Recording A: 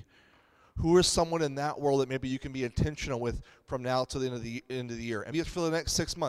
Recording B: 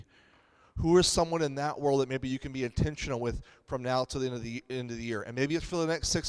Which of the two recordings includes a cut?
A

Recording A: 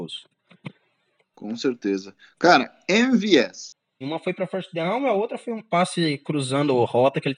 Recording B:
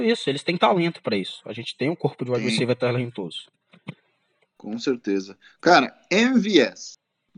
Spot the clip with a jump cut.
A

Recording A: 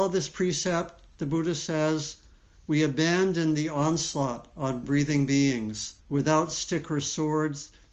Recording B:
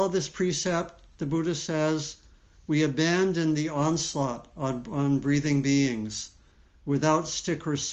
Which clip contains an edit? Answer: A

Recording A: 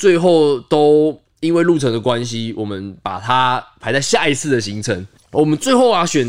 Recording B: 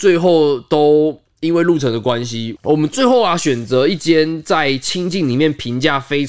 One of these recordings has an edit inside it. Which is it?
B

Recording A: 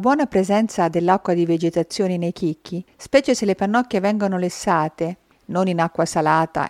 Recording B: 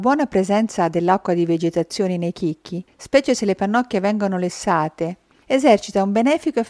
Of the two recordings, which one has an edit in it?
B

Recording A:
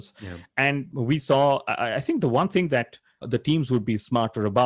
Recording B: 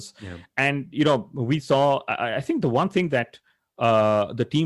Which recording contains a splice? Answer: A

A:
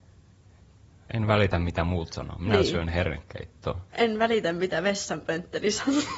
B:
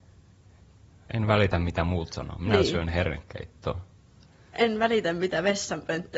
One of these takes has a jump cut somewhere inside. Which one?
A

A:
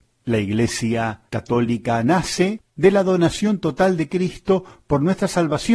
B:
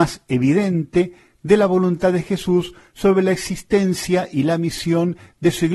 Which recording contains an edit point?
A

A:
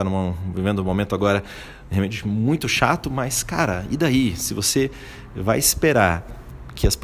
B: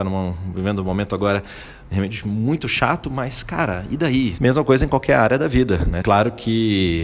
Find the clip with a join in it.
B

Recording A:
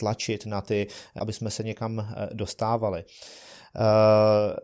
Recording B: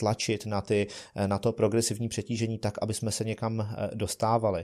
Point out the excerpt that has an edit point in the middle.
A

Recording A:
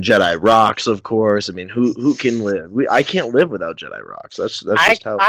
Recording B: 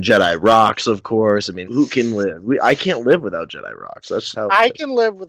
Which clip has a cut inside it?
B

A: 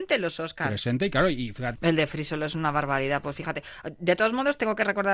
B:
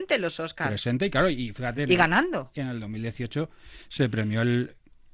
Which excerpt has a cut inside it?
A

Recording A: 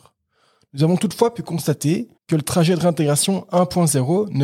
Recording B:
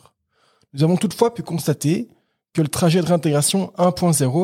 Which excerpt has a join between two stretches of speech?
A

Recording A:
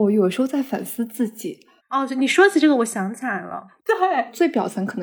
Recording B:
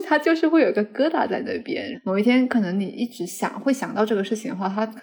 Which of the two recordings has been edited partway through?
A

